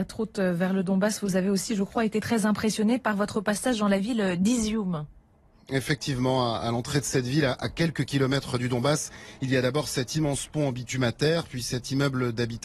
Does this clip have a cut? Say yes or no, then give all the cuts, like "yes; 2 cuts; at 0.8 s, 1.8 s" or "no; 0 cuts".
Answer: no; 0 cuts